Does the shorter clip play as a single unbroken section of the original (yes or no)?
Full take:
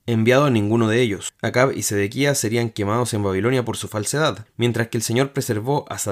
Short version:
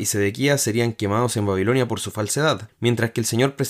yes